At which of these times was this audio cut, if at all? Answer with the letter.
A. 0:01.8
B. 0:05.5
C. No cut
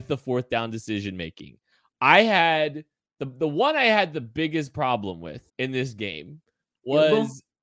B